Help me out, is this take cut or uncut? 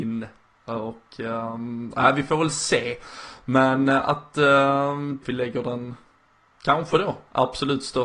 cut